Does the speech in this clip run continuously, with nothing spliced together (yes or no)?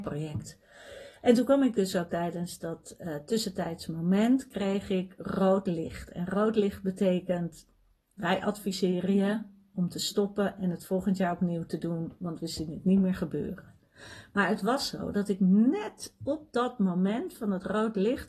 yes